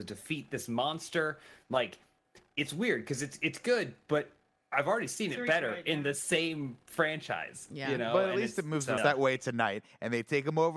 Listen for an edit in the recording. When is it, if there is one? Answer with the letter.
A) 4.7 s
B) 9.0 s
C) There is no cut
B